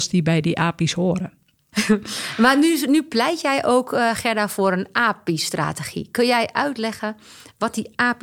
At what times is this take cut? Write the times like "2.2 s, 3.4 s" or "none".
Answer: 1.7 s